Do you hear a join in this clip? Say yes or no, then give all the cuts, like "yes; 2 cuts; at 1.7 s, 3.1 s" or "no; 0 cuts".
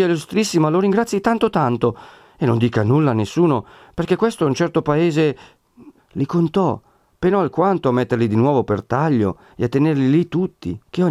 yes; 1 cut; at 6.0 s